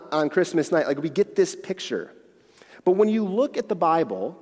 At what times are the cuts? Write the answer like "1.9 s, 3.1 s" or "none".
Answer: none